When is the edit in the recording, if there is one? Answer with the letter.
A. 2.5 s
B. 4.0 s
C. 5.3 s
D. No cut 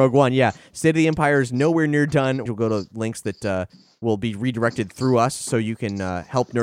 A